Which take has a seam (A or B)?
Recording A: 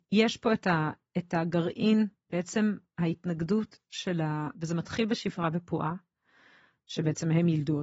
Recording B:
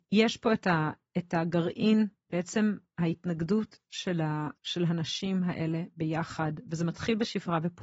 A